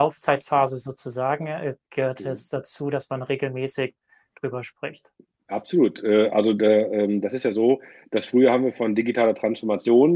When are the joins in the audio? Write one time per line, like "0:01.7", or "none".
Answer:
none